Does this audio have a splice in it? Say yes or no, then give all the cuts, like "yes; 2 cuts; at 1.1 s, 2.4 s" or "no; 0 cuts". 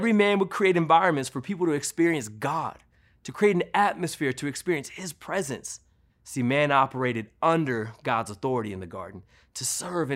yes; 1 cut; at 6.1 s